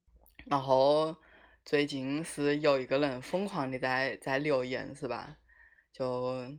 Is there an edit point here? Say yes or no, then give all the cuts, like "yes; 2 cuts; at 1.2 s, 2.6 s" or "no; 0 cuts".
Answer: no; 0 cuts